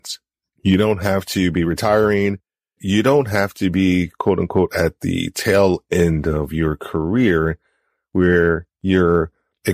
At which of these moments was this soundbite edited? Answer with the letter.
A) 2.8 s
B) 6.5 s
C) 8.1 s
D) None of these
A